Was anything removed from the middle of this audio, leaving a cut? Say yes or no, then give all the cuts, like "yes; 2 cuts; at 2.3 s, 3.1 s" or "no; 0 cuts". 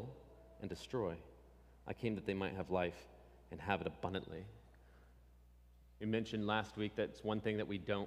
no; 0 cuts